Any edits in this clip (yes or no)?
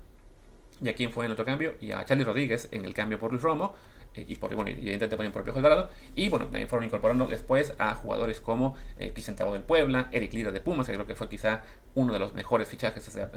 no